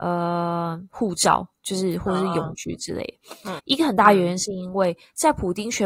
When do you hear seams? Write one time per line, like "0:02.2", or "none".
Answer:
0:03.6